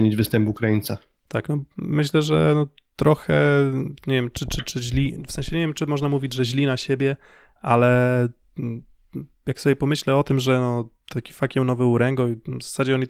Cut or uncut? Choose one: uncut